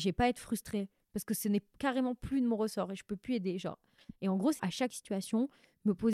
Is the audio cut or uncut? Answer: cut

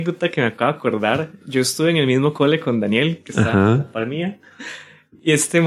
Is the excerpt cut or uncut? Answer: uncut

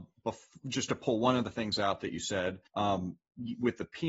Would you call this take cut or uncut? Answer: cut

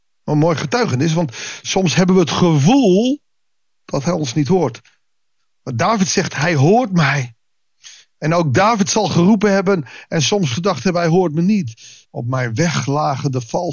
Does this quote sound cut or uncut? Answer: cut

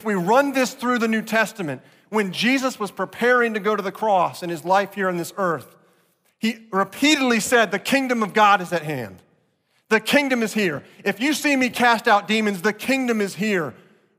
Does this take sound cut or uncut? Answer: uncut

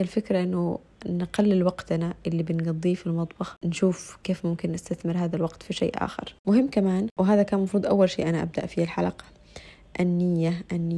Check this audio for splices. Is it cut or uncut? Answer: uncut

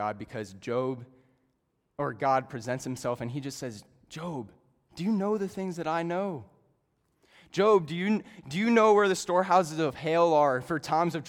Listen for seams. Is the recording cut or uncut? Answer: uncut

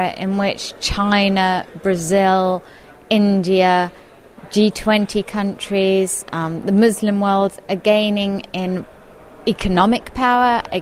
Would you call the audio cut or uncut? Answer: uncut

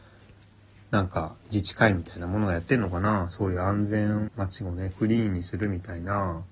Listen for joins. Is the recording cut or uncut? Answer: cut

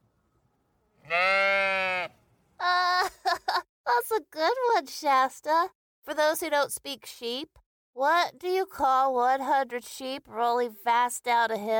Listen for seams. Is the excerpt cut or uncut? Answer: uncut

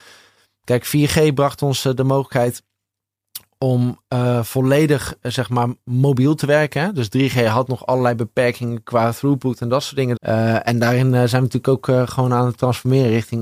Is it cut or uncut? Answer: cut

